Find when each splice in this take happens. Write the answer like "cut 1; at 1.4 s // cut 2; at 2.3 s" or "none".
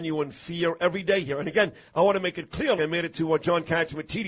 cut 1; at 2.8 s